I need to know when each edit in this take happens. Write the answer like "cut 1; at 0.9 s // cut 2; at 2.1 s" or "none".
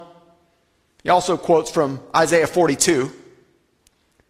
none